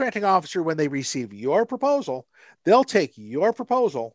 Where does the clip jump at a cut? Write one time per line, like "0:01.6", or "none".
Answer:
none